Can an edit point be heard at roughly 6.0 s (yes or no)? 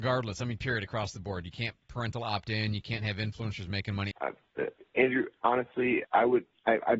yes